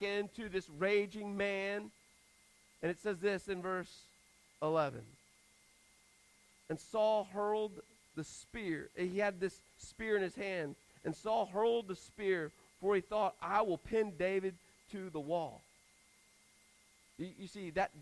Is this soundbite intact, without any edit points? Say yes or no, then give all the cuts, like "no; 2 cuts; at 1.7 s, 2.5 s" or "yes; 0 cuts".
yes; 0 cuts